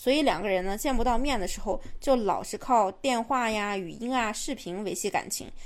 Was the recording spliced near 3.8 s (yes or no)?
no